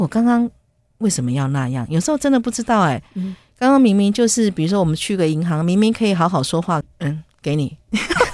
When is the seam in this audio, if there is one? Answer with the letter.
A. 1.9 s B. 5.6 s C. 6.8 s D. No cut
C